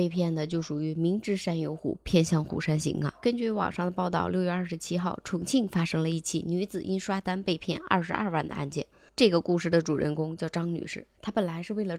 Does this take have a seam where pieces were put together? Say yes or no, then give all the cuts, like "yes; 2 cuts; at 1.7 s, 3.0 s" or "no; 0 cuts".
no; 0 cuts